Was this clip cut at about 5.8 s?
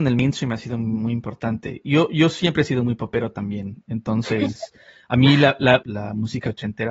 yes; 1 cut; at 5.8 s

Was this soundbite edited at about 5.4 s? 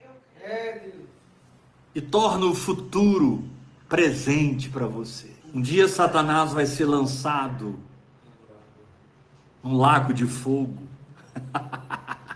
yes; 1 cut; at 5.4 s

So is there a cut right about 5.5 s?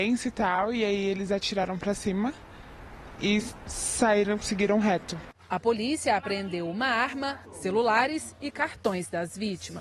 no; 1 cut; at 7.4 s

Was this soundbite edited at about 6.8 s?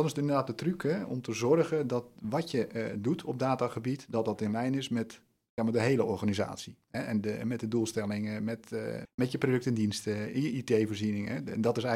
no; 1 cut; at 9.1 s

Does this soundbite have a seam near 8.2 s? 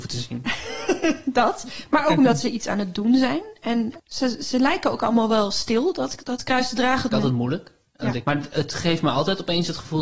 yes; 2 cuts; at 7.1 s, 8.2 s

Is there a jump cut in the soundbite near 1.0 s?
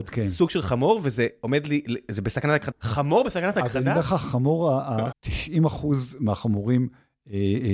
no; 2 cuts; at 2.7 s, 5.1 s

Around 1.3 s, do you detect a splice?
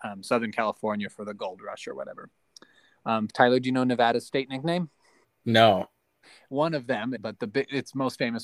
no; 3 cuts; at 3.3 s, 5.2 s, 7.2 s

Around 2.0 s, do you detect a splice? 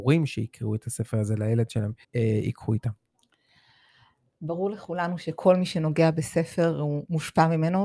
yes; 1 cut; at 2.0 s

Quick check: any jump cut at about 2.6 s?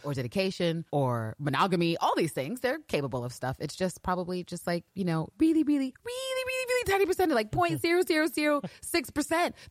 no; 1 cut; at 5.9 s

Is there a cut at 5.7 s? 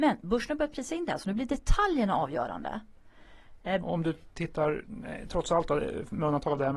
no; 1 cut; at 3.8 s

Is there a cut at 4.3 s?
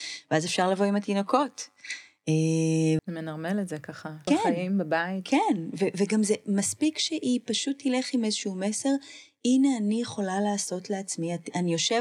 yes; 2 cuts; at 3.0 s, 4.3 s

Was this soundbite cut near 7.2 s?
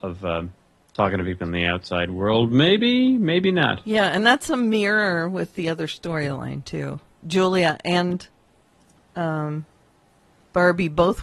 yes; 1 cut; at 7.2 s

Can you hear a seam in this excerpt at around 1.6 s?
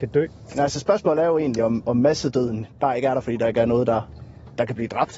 no; 0 cuts

